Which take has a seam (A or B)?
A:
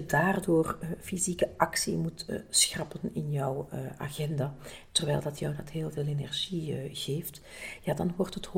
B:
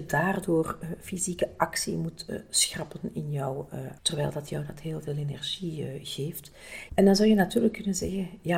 B